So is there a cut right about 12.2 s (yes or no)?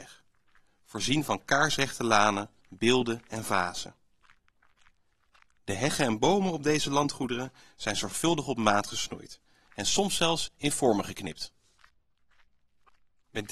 no